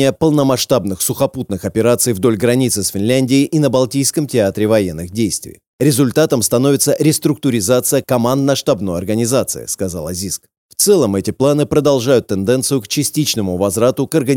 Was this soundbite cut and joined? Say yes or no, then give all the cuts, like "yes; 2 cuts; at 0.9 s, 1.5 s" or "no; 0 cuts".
no; 0 cuts